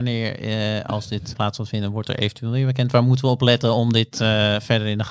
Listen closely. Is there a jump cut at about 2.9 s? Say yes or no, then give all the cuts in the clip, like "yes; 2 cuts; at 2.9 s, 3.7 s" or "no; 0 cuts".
no; 1 cut; at 1.3 s